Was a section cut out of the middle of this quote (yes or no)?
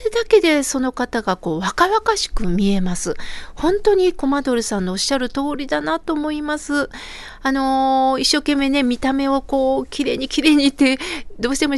no